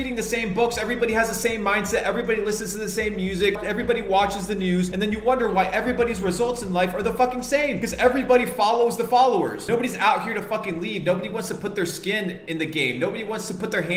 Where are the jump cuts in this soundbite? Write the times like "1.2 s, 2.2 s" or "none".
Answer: none